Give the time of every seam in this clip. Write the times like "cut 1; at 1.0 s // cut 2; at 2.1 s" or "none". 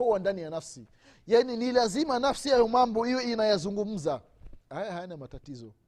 cut 1; at 4.6 s